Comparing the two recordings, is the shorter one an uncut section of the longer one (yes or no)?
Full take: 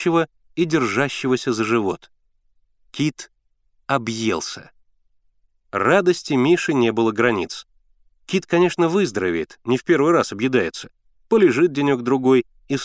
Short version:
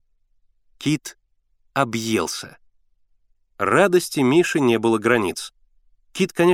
yes